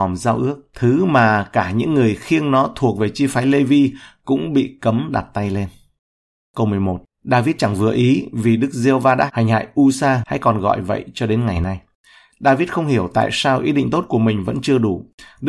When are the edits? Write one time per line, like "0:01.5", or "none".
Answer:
0:10.2